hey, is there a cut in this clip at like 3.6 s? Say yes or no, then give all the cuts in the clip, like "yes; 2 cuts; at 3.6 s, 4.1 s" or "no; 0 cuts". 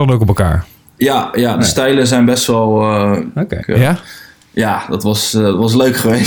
yes; 1 cut; at 3.6 s